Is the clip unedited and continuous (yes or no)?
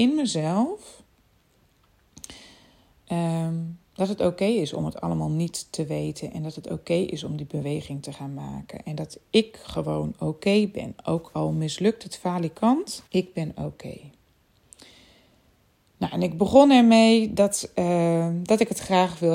no